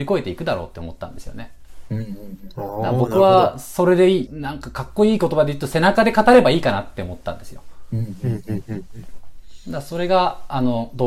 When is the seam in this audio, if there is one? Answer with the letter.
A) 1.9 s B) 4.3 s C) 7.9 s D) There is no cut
B